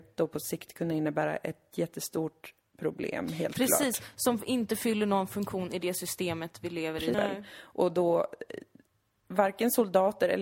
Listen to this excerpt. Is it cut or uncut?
cut